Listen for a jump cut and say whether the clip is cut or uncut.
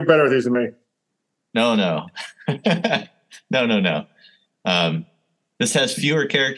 uncut